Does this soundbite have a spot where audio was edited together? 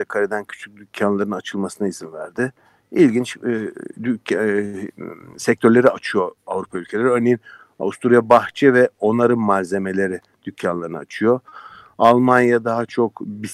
no; 0 cuts

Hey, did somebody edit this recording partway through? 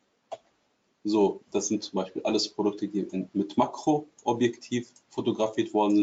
yes; 1 cut; at 1.4 s

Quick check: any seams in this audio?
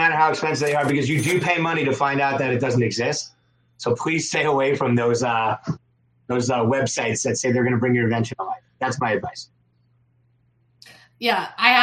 no; 0 cuts

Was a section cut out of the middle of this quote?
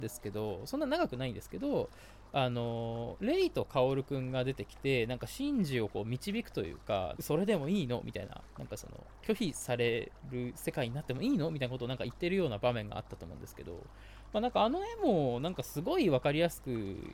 yes; 1 cut; at 7.1 s

